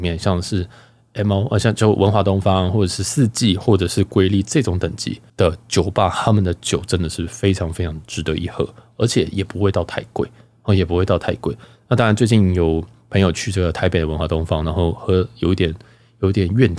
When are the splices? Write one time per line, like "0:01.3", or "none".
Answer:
0:05.3